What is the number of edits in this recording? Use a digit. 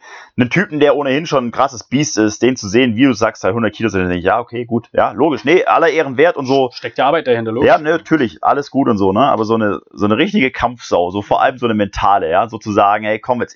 0